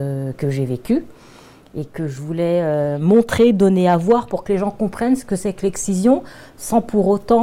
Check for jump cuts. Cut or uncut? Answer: uncut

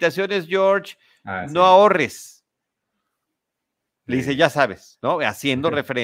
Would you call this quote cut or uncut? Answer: uncut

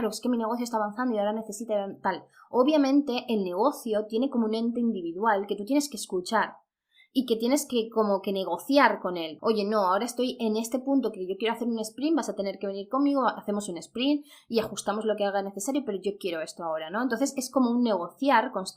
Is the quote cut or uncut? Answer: cut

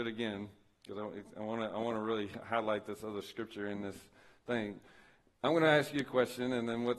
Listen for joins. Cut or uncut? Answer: uncut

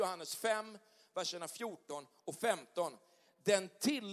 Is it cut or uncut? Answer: uncut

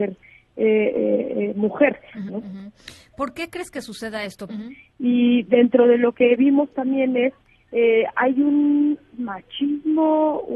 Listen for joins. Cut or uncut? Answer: cut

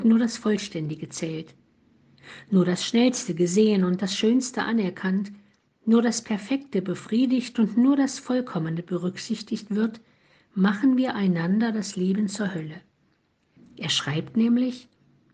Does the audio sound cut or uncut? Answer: cut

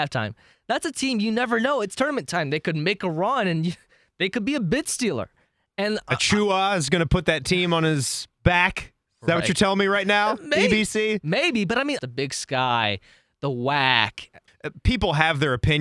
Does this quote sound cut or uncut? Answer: cut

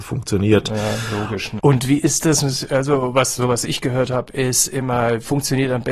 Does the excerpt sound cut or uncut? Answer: cut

